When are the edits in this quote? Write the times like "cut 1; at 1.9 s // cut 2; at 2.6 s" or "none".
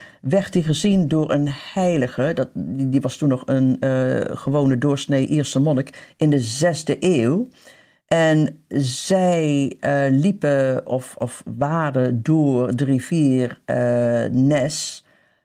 none